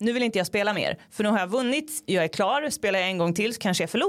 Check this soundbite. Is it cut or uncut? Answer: uncut